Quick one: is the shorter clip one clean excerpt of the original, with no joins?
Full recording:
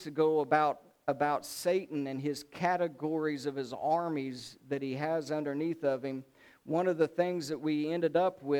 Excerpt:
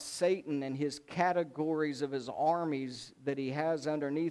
yes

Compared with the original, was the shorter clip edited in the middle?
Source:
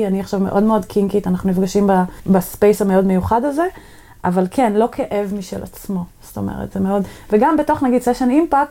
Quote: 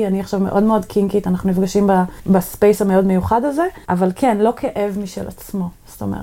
yes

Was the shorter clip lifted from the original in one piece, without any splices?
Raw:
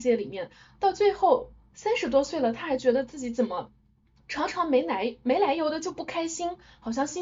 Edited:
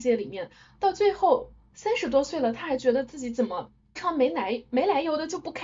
no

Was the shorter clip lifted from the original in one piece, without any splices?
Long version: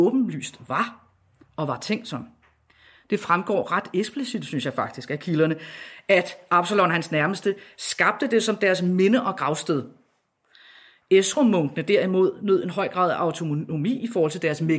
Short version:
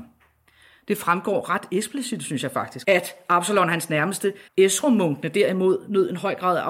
no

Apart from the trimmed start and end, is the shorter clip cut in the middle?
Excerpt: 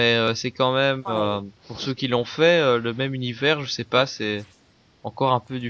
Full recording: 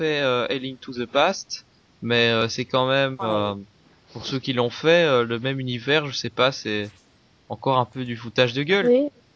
yes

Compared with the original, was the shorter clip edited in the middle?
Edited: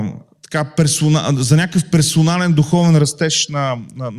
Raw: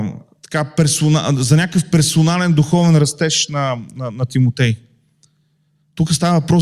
no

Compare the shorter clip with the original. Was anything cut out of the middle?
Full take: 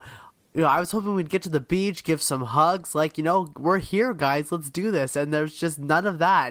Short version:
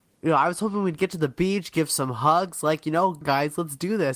yes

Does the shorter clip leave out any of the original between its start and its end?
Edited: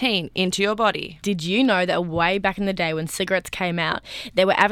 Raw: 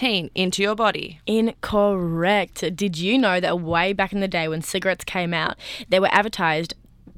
yes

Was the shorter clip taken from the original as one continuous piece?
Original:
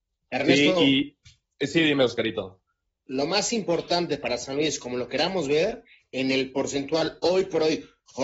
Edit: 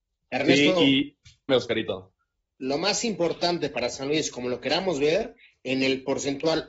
no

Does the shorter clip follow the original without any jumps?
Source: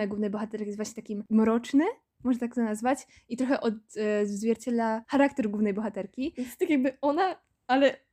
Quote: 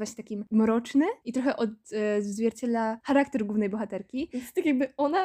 no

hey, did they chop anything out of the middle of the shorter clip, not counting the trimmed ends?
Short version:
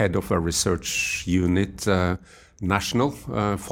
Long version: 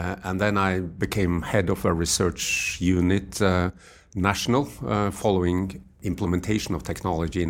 no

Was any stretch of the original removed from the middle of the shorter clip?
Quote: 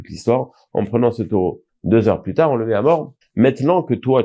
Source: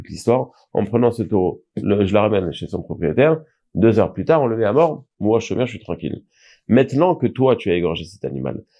yes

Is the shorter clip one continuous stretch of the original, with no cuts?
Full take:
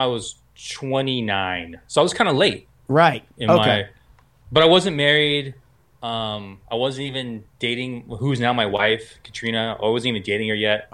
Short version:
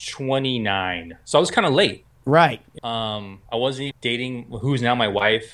no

